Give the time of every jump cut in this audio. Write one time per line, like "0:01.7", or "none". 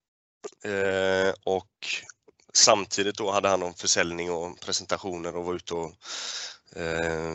none